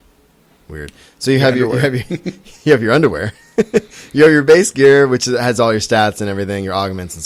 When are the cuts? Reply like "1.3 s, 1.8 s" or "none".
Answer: none